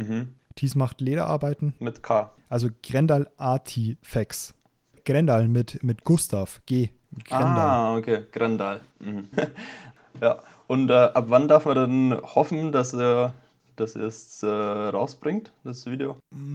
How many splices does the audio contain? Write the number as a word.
one